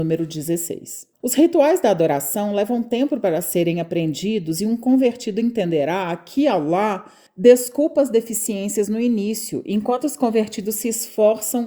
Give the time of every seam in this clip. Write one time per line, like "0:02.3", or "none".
0:01.1